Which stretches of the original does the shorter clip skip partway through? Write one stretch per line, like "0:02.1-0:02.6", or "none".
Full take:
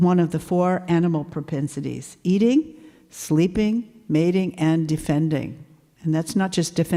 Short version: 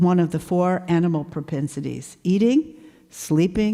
none